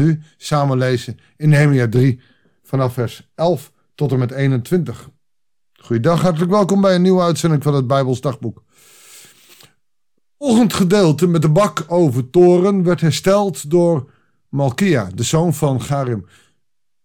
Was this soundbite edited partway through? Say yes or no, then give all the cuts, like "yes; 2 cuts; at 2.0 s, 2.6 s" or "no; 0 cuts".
no; 0 cuts